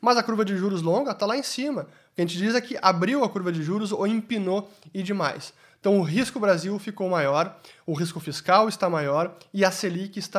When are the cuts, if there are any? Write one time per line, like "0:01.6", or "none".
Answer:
none